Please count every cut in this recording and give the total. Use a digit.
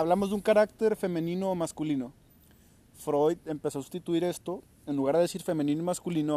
0